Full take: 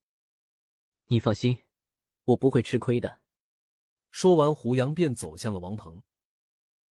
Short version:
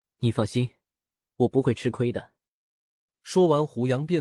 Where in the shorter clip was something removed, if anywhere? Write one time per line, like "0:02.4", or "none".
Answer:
none